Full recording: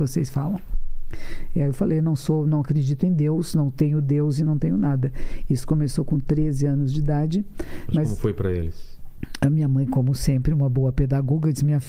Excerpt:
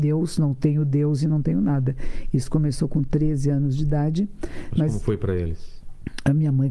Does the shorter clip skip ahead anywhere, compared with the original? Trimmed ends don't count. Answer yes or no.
no